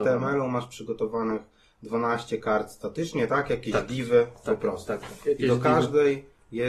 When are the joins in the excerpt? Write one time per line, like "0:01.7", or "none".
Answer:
none